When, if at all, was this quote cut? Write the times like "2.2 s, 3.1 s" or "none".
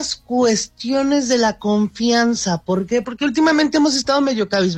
3.0 s